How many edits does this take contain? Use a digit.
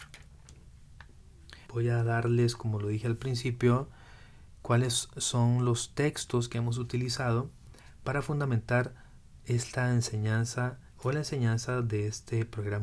2